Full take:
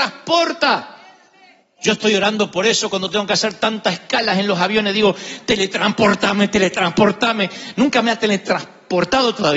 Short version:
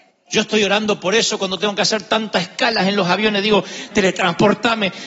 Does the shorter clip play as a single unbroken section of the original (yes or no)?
no